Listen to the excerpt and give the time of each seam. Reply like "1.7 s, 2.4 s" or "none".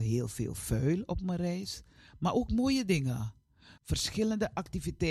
3.8 s